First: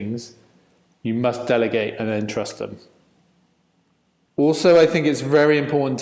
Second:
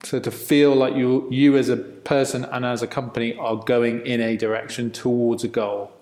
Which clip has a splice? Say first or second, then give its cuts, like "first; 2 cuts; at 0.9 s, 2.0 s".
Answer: first; 1 cut; at 4.3 s